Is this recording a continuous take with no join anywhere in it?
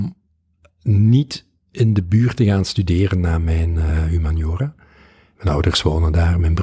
no; 1 cut; at 5.3 s

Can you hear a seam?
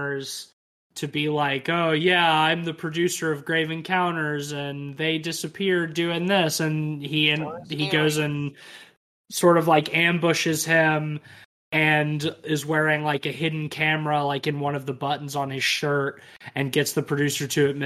no; 0 cuts

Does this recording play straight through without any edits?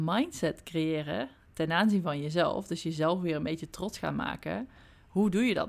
yes; 0 cuts

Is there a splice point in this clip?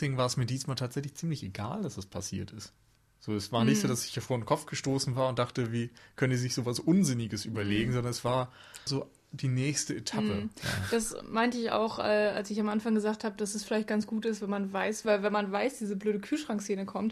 yes; 2 cuts; at 8.9 s, 15.0 s

